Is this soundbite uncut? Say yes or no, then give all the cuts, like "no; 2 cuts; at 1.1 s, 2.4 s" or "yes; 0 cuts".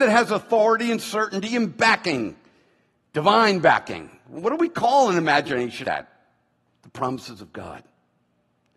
no; 1 cut; at 5.8 s